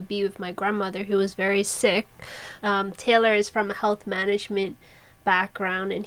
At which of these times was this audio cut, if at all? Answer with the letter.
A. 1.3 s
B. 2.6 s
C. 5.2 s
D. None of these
B